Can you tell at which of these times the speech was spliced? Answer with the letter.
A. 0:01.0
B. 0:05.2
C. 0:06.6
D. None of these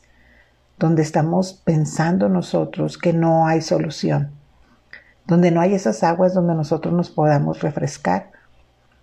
B